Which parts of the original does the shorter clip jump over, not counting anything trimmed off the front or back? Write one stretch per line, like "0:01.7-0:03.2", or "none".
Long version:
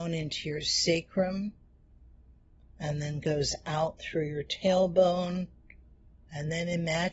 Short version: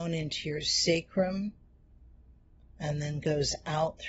none